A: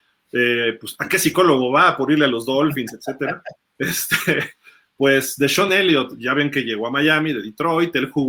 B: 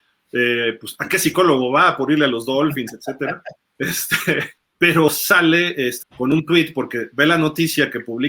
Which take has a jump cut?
B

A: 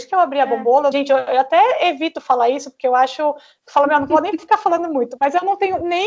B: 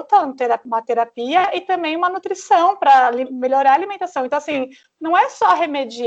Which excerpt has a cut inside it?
A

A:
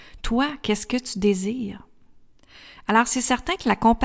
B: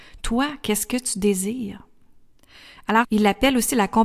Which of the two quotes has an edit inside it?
B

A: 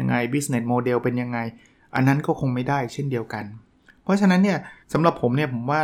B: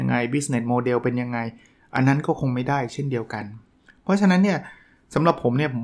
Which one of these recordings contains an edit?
A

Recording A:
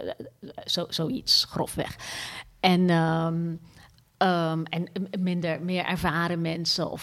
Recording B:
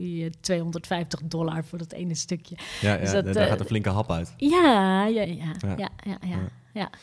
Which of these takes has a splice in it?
B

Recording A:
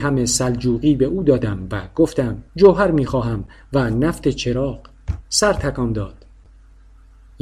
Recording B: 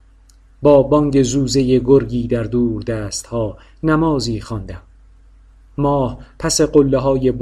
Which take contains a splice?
A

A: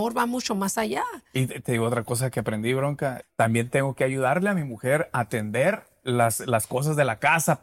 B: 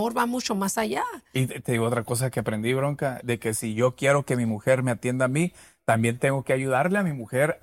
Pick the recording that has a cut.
A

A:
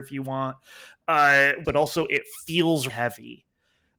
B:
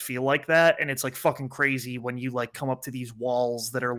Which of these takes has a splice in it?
A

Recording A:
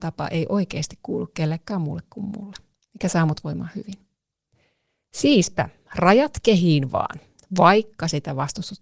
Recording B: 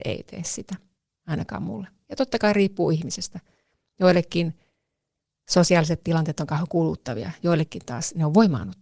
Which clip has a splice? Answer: A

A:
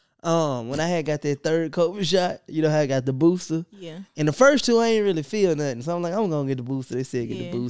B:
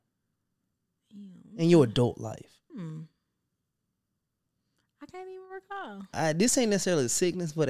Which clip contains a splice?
B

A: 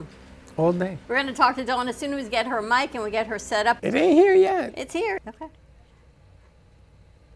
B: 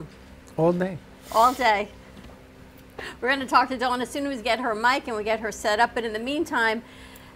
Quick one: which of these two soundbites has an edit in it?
A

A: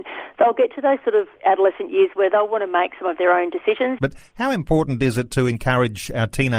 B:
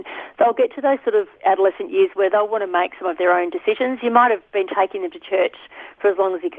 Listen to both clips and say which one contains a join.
A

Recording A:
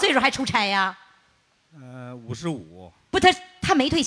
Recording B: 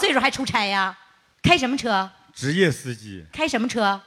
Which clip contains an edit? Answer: B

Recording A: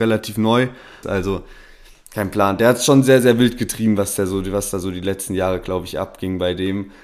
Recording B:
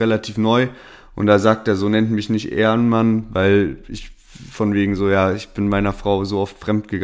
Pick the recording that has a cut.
A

